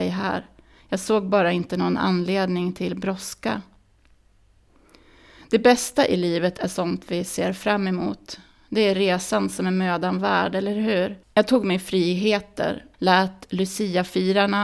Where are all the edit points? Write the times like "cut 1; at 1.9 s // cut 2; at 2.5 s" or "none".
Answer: cut 1; at 11.2 s // cut 2; at 12.9 s